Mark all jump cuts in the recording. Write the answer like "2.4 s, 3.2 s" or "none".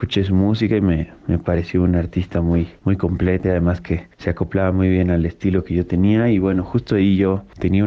3.4 s